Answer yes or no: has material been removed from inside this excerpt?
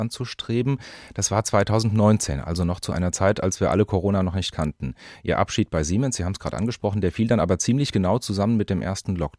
no